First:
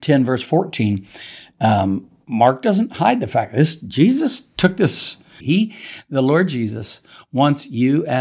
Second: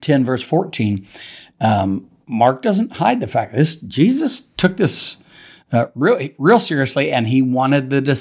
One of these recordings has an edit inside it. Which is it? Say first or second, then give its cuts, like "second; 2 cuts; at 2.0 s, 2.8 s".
first; 1 cut; at 5.4 s